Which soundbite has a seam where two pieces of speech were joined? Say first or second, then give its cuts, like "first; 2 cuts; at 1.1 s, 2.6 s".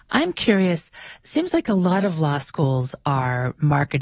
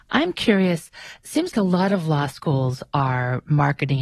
second; 1 cut; at 1.5 s